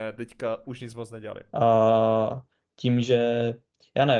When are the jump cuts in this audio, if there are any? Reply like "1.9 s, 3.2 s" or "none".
1.5 s